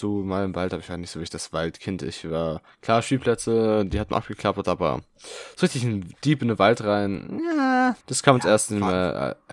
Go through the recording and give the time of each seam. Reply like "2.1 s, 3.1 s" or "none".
8.0 s